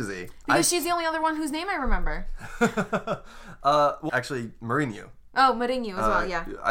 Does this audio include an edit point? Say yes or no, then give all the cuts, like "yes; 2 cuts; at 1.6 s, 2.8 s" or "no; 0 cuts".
yes; 1 cut; at 4.1 s